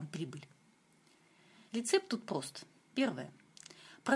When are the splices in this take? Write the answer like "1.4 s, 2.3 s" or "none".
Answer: 1.7 s